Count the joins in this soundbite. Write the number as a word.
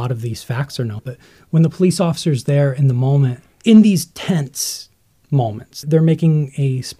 three